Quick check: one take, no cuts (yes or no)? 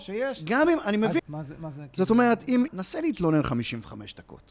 no